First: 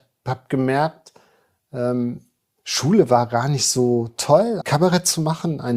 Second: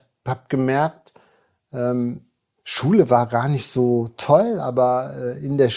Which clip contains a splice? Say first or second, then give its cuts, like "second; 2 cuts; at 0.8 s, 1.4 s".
first; 1 cut; at 4.6 s